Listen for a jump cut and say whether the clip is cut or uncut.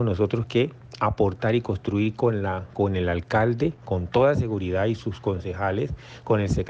uncut